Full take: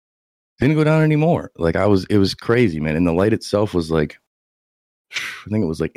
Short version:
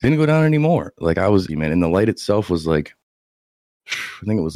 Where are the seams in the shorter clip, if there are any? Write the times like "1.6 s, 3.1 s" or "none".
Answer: 1.5 s